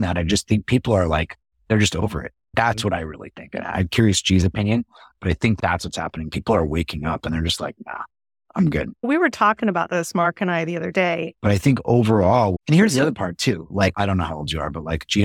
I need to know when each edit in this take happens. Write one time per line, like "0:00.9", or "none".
0:11.3
0:12.5
0:13.9